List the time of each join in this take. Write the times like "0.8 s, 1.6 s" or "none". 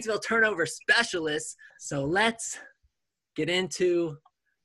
1.7 s

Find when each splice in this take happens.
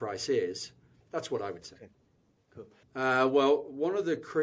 1.0 s, 2.8 s

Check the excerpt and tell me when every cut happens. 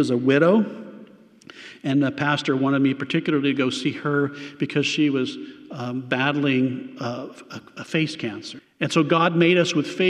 8.6 s

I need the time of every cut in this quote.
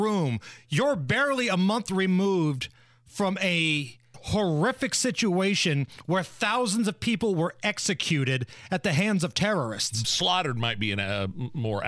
4.1 s, 10.0 s

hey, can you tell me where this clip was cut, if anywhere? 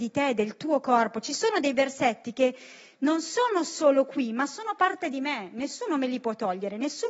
4.8 s

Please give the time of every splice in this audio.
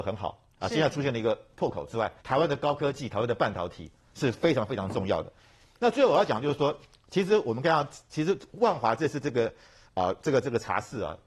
2.2 s

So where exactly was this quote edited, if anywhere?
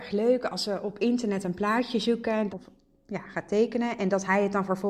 2.5 s

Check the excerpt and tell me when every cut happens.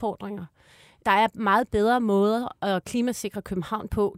none

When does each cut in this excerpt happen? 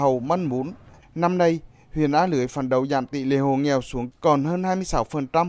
1.0 s

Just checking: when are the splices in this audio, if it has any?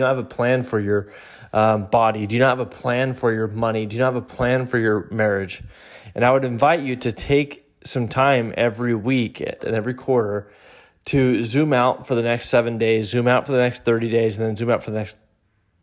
9.6 s

